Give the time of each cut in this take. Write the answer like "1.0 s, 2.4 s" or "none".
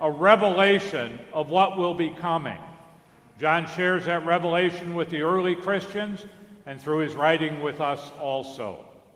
none